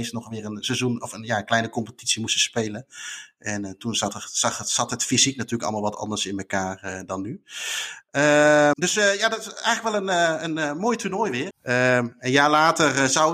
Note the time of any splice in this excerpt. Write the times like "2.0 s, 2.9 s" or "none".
8.7 s, 11.5 s